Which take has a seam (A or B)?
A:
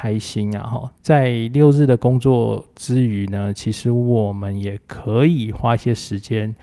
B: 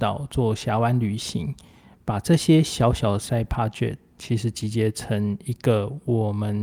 A